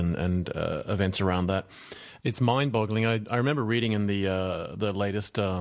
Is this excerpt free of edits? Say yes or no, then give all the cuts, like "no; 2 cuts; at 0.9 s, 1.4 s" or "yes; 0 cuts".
no; 1 cut; at 2.2 s